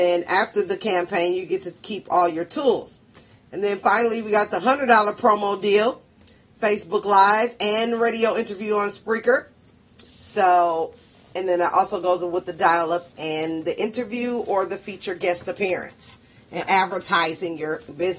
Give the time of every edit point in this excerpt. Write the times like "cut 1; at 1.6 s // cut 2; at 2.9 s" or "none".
cut 1; at 10.0 s // cut 2; at 13.1 s // cut 3; at 16.7 s